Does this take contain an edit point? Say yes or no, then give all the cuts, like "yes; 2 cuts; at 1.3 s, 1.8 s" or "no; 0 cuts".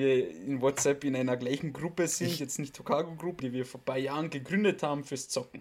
yes; 1 cut; at 3.4 s